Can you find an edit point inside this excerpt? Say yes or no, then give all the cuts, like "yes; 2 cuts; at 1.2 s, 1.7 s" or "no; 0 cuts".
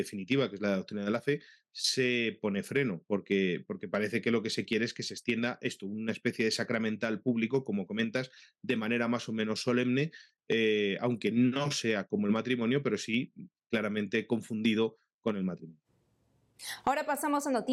no; 0 cuts